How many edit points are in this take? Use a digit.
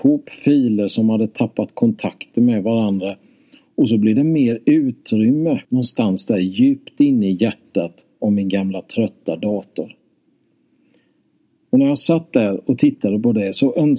1